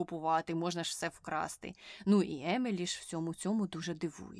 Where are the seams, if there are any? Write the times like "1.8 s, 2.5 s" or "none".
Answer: none